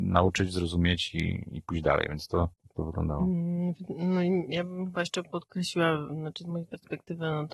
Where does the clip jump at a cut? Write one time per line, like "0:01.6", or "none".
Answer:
0:02.5